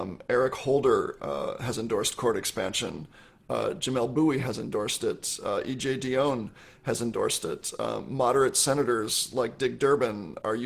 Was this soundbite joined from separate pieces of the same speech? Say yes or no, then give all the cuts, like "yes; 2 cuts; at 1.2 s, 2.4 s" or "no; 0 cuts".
no; 0 cuts